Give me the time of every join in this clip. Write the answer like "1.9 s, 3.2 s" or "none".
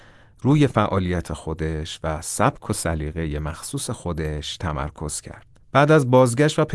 none